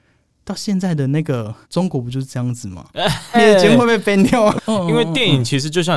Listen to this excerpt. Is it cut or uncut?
cut